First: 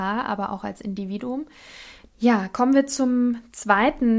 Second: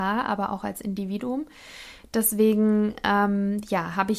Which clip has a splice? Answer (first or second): first